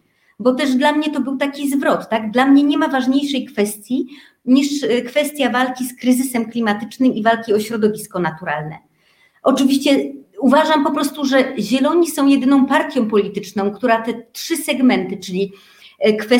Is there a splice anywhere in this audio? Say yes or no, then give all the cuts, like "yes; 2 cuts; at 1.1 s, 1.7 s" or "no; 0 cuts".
no; 0 cuts